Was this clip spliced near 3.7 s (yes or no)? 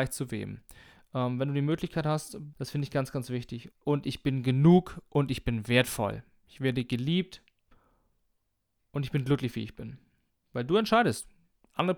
yes